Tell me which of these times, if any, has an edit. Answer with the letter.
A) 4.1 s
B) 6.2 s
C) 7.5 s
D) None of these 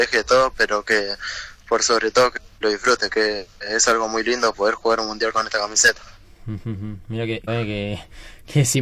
C